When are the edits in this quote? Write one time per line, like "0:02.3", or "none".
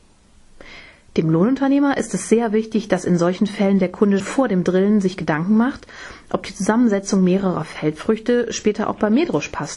0:04.2